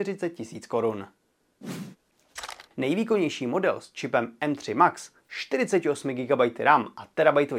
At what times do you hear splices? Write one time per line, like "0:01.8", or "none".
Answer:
0:02.7